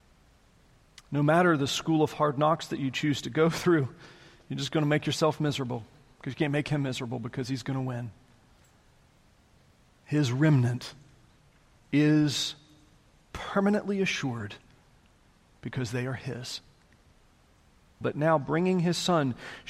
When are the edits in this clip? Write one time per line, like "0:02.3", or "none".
0:18.0